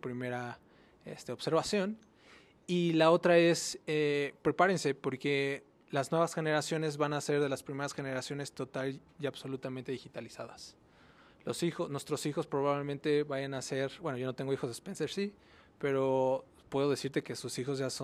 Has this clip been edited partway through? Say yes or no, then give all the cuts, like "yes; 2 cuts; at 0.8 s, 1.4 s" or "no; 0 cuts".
no; 0 cuts